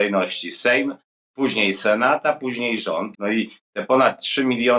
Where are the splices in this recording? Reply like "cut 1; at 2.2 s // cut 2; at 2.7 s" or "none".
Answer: cut 1; at 3.1 s